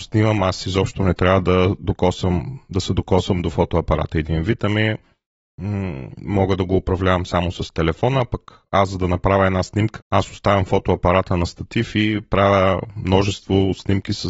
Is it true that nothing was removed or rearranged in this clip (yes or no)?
no